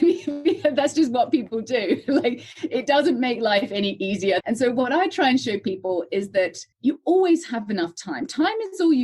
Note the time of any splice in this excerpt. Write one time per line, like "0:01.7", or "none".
0:04.4
0:06.7